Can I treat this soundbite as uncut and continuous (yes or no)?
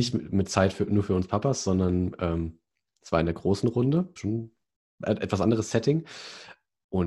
no